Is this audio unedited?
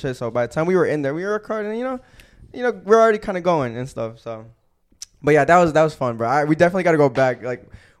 yes; 0 cuts

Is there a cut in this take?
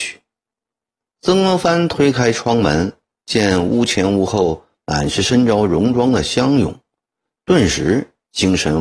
yes; 1 cut; at 1.1 s

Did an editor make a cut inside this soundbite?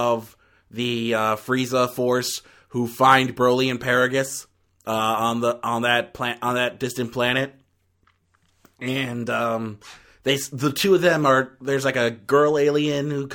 no; 0 cuts

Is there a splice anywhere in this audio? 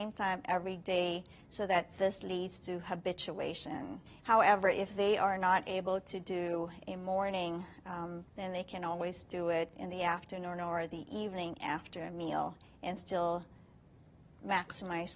yes; 2 cuts; at 4.2 s, 8.3 s

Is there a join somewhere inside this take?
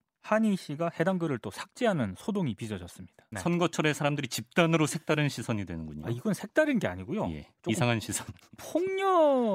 yes; 1 cut; at 3.3 s

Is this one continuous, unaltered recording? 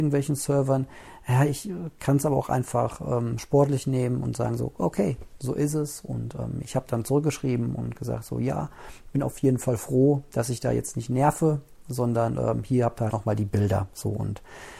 no; 1 cut; at 13.1 s

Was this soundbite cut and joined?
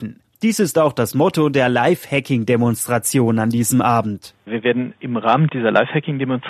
no; 0 cuts

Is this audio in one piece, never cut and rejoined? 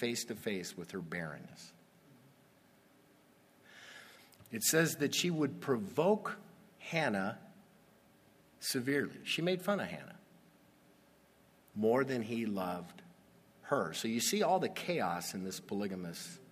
no; 2 cuts; at 4.4 s, 11.7 s

